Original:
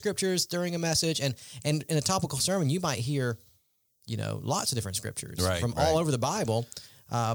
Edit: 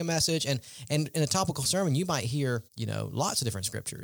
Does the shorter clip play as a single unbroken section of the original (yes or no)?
no